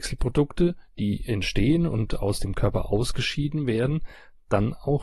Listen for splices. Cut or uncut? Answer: uncut